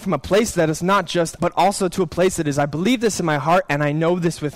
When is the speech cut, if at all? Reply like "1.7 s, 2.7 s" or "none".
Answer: 1.4 s

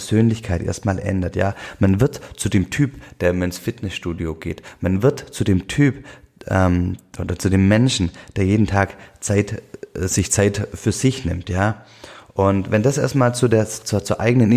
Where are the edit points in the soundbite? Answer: none

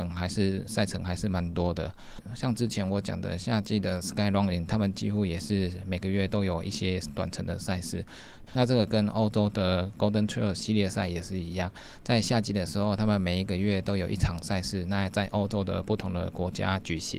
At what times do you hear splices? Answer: 8.5 s

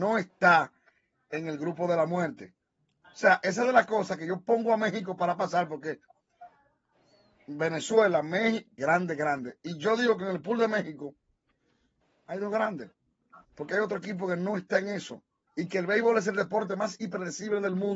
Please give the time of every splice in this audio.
8.8 s, 15.5 s

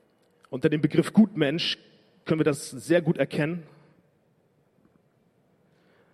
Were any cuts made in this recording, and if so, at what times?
none

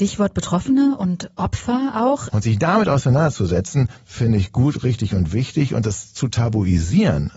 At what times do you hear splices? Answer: 2.3 s

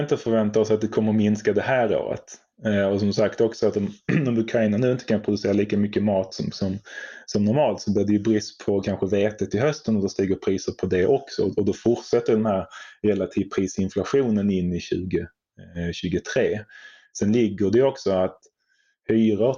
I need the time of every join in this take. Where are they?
none

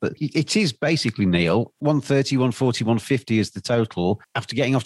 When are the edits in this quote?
none

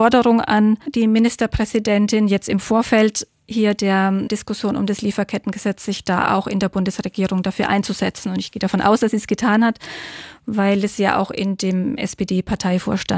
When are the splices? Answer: none

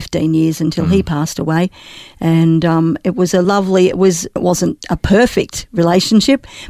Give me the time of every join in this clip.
4.4 s

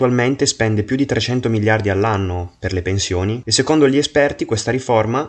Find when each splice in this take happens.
3.4 s

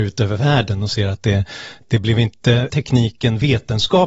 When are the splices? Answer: 2.7 s

